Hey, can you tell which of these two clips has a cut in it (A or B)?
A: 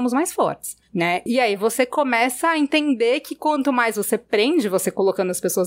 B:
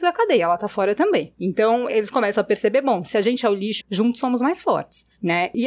B